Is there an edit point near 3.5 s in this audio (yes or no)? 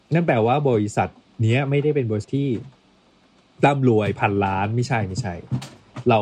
no